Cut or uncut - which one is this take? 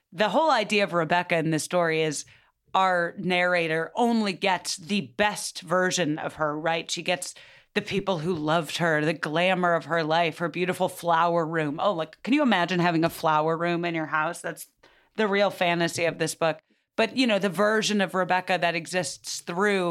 uncut